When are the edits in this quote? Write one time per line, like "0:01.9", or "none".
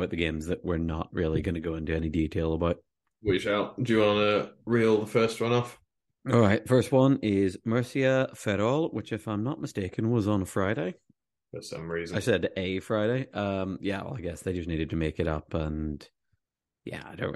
none